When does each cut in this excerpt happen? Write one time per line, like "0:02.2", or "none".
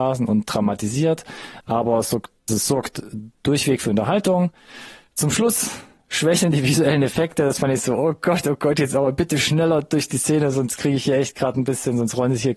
0:02.5